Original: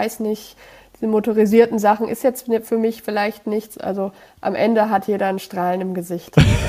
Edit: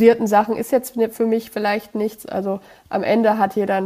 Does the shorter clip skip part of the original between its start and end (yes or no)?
no